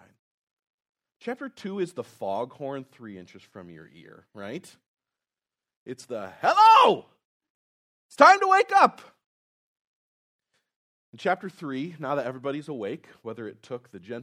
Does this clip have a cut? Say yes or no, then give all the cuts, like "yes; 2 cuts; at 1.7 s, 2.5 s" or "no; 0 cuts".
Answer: no; 0 cuts